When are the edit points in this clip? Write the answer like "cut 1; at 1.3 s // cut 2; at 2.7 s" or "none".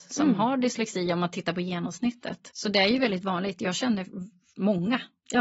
cut 1; at 2.5 s